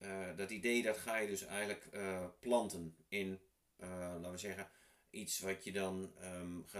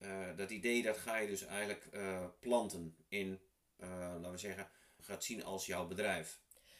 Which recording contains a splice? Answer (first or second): second